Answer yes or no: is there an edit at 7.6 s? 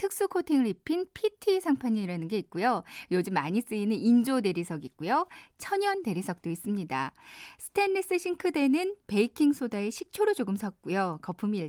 no